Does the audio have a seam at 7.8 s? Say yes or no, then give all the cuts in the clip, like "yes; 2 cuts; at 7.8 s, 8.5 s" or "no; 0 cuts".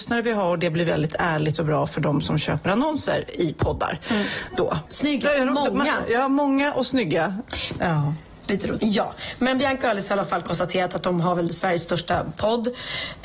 yes; 3 cuts; at 4.9 s, 7.8 s, 8.8 s